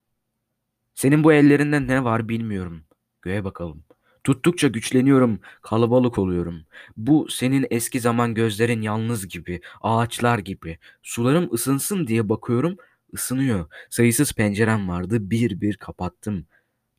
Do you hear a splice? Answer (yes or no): yes